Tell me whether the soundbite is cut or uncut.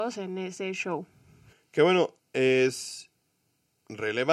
cut